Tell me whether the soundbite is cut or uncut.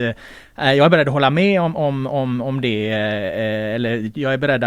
uncut